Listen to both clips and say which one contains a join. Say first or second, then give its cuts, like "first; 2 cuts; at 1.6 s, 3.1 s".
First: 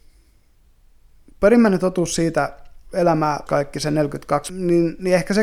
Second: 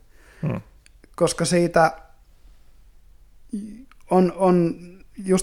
first; 2 cuts; at 3.5 s, 4.5 s